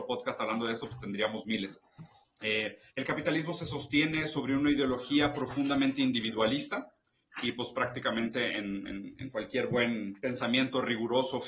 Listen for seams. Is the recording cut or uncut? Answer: cut